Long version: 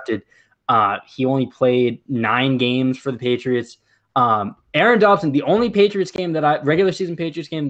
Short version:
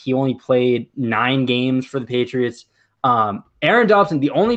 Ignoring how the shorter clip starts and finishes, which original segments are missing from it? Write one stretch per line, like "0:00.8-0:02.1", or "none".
none